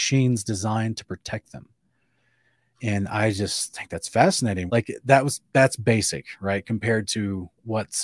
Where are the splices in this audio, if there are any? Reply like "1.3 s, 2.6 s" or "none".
4.7 s